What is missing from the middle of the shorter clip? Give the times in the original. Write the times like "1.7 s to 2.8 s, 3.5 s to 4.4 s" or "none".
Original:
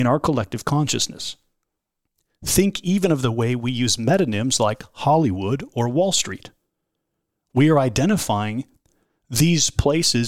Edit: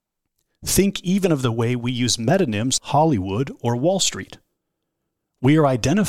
4.6 s to 4.9 s